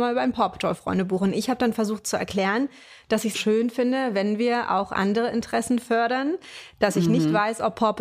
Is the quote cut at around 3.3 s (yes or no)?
yes